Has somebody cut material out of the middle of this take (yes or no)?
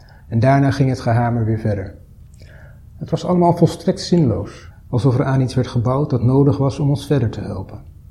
yes